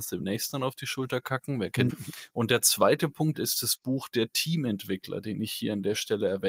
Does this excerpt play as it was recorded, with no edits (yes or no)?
no